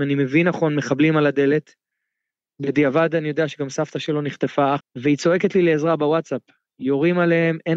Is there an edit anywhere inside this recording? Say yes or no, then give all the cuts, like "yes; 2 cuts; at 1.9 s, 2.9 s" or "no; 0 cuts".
yes; 1 cut; at 4.8 s